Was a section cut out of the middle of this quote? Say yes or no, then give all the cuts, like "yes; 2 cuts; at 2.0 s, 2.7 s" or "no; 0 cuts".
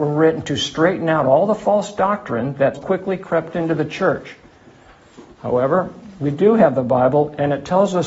yes; 1 cut; at 2.8 s